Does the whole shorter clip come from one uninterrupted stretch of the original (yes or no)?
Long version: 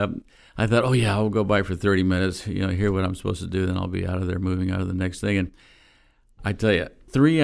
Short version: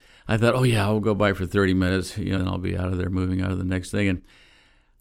no